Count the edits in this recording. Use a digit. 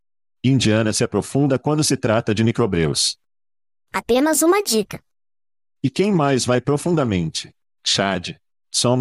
0